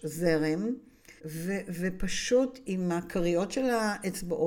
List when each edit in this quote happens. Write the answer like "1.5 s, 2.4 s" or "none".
1.2 s